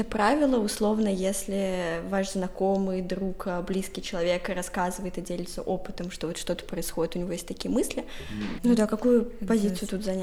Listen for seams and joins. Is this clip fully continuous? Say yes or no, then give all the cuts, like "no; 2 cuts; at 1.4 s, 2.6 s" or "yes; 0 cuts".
no; 1 cut; at 8.6 s